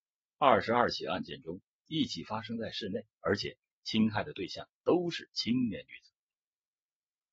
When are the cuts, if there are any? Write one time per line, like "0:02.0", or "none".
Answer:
0:01.7
0:03.2